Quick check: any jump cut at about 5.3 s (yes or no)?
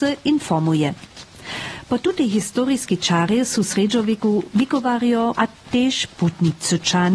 yes